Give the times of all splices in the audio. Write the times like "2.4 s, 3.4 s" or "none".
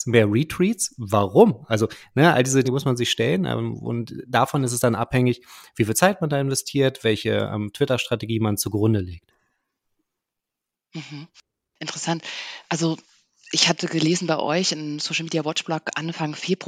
2.6 s